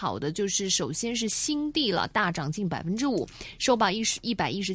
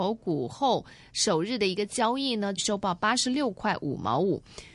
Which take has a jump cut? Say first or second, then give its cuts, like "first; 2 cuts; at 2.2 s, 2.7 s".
second; 1 cut; at 2.6 s